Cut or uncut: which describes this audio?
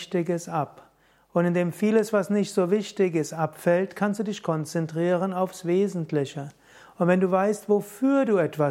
uncut